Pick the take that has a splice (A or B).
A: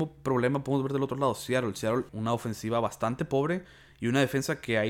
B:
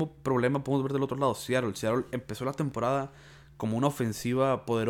A